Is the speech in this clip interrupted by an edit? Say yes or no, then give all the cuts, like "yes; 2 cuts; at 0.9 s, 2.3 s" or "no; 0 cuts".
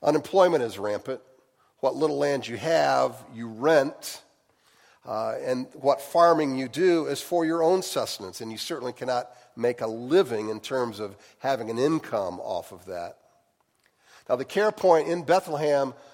no; 0 cuts